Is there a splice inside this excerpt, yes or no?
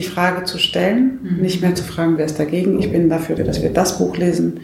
yes